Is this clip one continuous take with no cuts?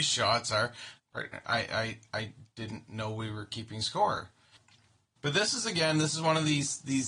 no; 1 cut; at 1.0 s

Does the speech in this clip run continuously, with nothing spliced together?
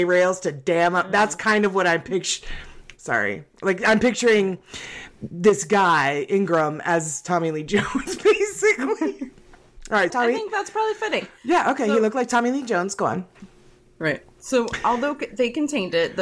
no; 1 cut; at 10.1 s

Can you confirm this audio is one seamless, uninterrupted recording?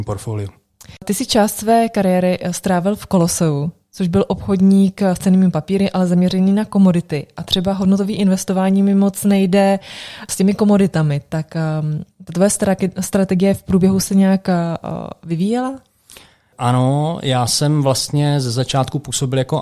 yes; 0 cuts

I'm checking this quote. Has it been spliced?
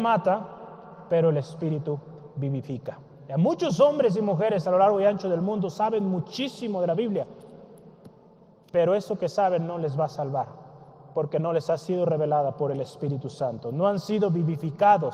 no; 0 cuts

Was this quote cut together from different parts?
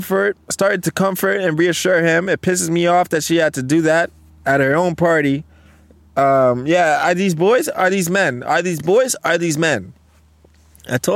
no; 0 cuts

